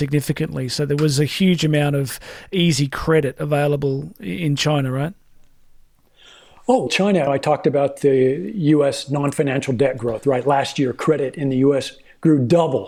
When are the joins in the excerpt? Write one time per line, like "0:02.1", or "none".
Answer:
none